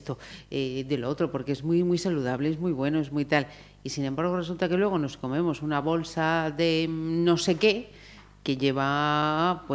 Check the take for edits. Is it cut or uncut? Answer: uncut